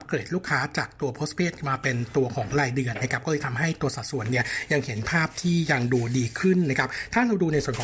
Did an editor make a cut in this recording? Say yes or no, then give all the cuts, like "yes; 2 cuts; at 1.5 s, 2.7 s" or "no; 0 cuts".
no; 0 cuts